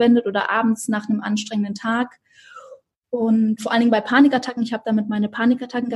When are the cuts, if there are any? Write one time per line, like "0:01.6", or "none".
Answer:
none